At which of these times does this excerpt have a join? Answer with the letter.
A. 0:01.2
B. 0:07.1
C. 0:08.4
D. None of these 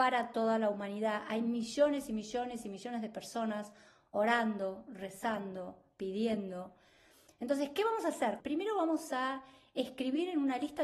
C